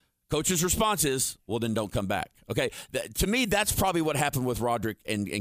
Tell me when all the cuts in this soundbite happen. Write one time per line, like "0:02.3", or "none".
none